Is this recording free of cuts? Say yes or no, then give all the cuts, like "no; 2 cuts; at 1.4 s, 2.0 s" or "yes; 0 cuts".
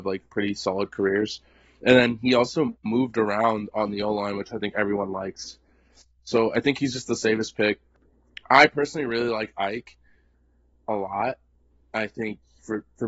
yes; 0 cuts